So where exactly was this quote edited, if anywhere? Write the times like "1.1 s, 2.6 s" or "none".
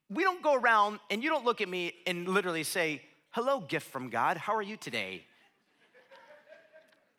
none

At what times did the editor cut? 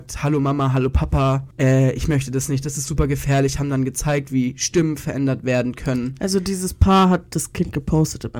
1.5 s

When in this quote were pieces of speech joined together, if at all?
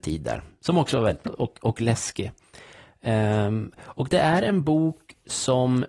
1.2 s

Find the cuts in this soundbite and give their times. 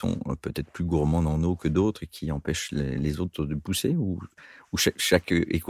none

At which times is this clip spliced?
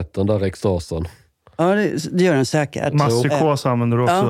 none

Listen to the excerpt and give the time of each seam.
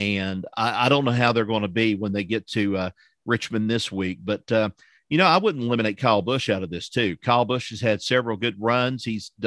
none

